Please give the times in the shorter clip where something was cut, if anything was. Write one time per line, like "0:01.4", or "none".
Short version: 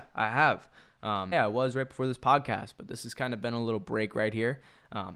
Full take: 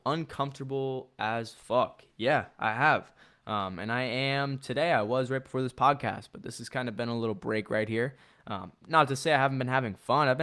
0:01.3